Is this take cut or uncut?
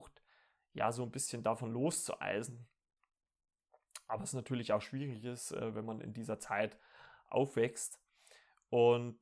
uncut